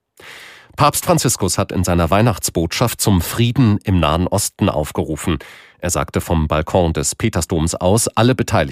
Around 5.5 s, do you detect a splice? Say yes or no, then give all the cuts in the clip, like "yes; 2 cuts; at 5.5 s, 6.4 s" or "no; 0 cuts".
no; 0 cuts